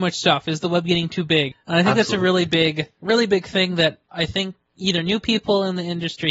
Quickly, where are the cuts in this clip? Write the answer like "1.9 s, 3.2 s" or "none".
1.5 s